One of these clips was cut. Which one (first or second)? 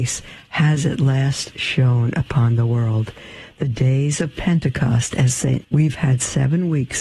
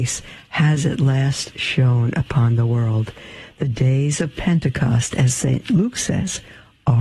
first